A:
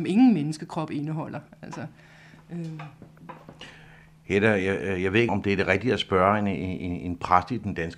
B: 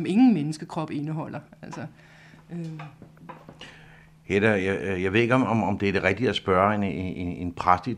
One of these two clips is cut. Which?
A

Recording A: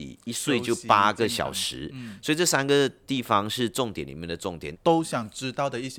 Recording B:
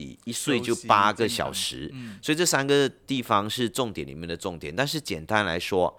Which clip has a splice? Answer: A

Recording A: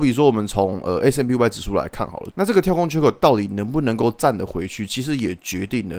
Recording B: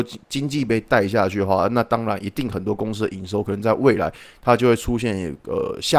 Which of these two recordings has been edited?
A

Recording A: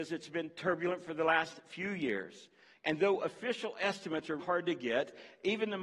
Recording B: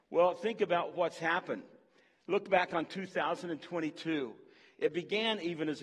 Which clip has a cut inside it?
A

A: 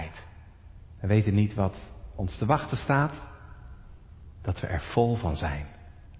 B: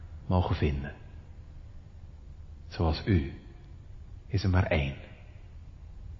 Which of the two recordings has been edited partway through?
A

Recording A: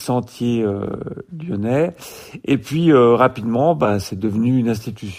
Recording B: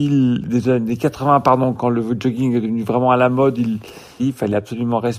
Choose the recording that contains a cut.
B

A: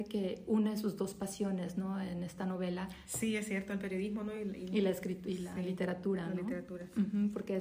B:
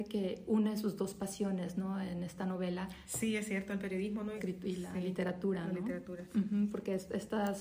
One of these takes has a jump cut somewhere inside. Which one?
B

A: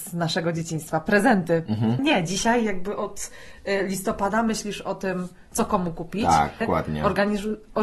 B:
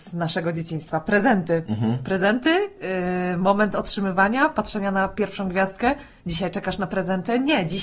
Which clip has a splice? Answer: A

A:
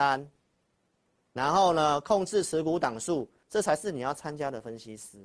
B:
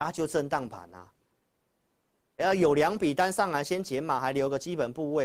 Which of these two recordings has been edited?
A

